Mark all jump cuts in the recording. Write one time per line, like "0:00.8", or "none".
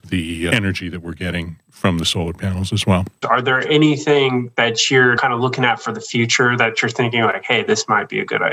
0:03.2
0:05.2